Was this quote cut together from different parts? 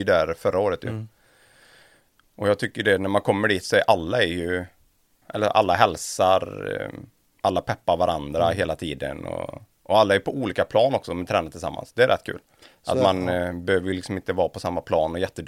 no; 0 cuts

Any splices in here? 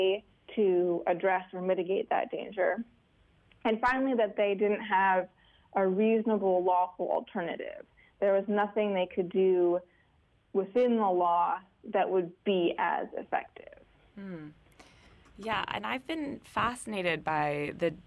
no; 0 cuts

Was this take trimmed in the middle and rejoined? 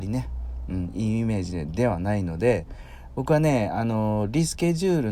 no; 0 cuts

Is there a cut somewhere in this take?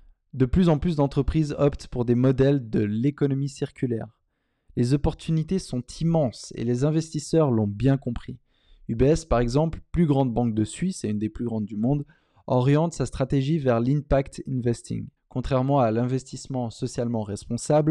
yes; 1 cut; at 15.2 s

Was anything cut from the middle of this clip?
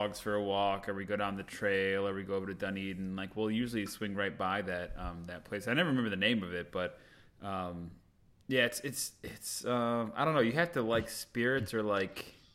no; 0 cuts

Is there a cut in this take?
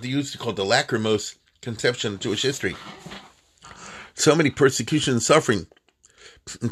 no; 0 cuts

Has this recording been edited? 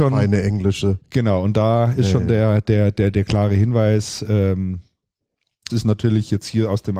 yes; 1 cut; at 5.7 s

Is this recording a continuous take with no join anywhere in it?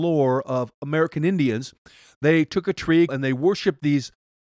no; 1 cut; at 3.1 s

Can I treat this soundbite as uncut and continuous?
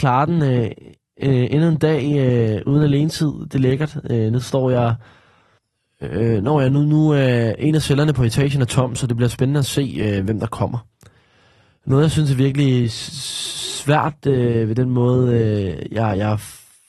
yes; 0 cuts

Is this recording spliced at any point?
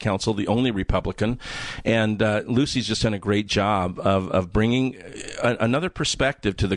no; 0 cuts

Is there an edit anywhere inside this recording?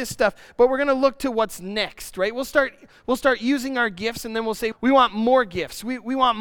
yes; 1 cut; at 4.7 s

